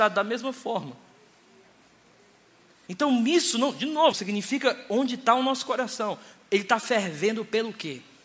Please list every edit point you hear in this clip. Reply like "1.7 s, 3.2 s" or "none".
2.9 s, 4.1 s